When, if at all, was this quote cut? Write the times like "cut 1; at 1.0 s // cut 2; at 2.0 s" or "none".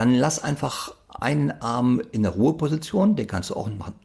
none